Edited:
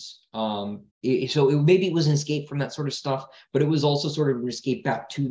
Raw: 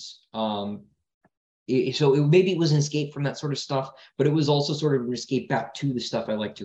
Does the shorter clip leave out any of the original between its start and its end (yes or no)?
yes